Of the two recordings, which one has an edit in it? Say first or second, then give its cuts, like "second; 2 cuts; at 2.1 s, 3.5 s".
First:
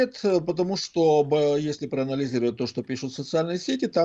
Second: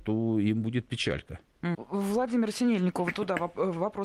second; 1 cut; at 1.7 s